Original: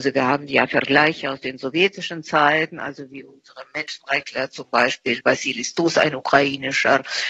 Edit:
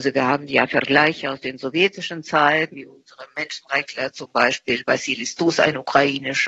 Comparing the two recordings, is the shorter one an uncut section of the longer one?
no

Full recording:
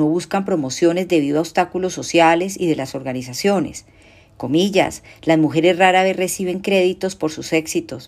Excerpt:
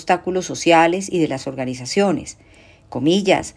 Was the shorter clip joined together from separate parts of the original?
no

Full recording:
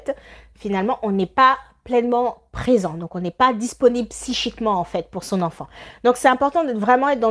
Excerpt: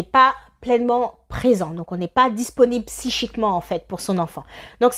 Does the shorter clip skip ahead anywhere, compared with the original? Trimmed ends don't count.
no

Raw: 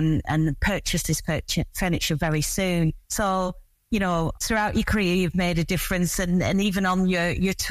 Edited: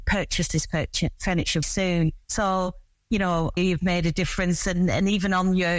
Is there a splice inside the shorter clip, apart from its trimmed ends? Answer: yes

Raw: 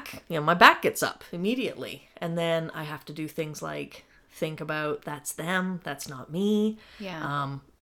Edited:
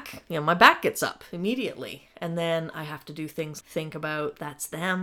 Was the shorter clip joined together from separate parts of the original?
yes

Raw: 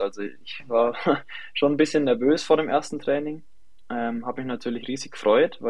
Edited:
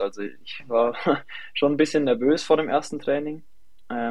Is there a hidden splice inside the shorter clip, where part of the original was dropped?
no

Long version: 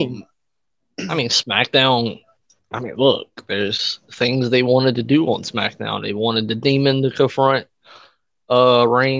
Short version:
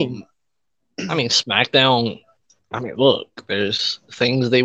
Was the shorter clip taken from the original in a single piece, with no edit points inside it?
yes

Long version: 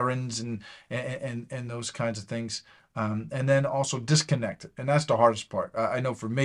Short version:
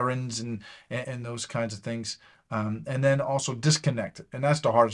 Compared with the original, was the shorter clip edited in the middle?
yes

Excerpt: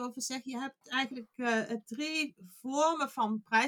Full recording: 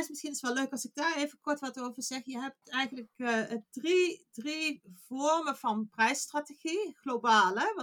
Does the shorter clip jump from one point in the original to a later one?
yes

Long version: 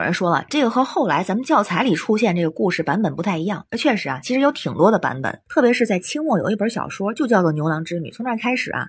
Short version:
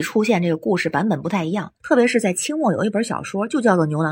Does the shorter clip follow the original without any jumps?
no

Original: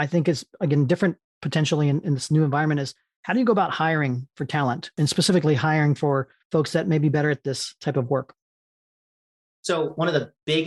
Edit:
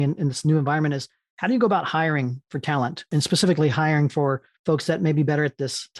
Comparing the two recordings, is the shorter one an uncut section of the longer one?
yes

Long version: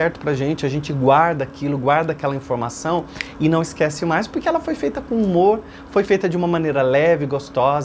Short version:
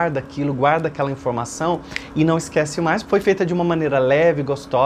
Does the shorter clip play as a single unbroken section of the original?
no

